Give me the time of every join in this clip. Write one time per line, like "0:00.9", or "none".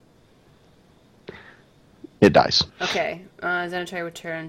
0:02.7